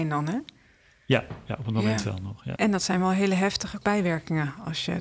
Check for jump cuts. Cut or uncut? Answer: cut